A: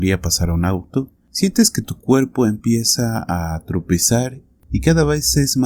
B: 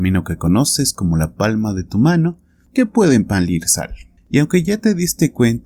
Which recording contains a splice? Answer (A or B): B